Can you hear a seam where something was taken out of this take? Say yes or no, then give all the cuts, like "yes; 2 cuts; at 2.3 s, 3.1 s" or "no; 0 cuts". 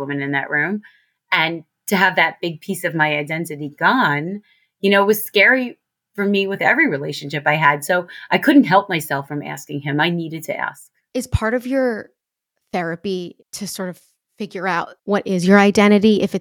yes; 3 cuts; at 11.1 s, 13.4 s, 15.0 s